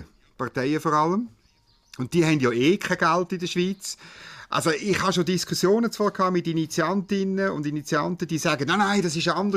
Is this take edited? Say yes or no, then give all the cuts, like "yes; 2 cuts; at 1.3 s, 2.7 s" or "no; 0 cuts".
no; 0 cuts